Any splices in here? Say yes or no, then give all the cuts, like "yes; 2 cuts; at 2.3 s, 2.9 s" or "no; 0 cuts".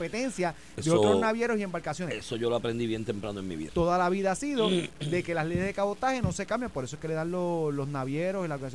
yes; 1 cut; at 3.7 s